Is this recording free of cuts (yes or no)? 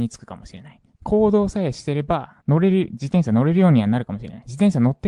no